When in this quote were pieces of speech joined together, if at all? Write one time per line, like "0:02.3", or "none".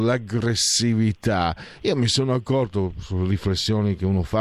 none